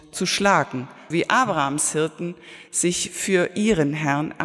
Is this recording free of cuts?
no; 1 cut; at 1.1 s

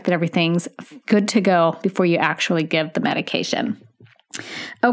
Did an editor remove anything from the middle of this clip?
yes; 1 cut; at 1.0 s

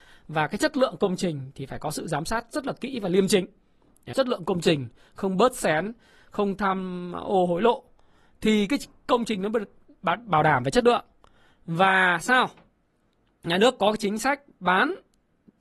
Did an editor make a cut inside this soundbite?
yes; 1 cut; at 4.1 s

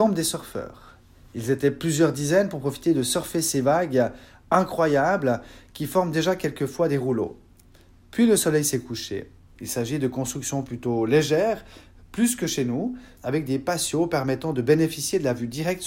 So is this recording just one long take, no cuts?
no; 2 cuts; at 9.5 s, 13.2 s

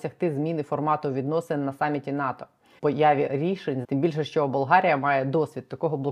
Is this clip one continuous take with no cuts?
no; 2 cuts; at 2.8 s, 3.8 s

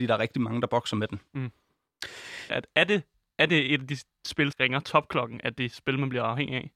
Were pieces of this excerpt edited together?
yes; 2 cuts; at 2.5 s, 4.5 s

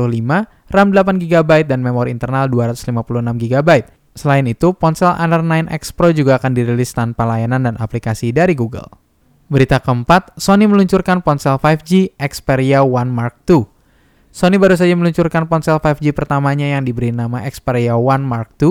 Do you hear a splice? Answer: yes; 1 cut; at 4.1 s

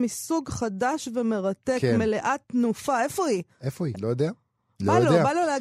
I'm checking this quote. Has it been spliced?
yes; 1 cut; at 3.9 s

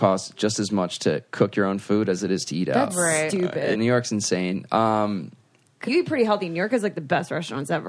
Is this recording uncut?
no; 2 cuts; at 3.7 s, 5.9 s

